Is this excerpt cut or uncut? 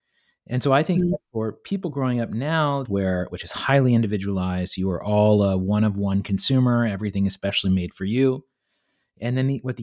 cut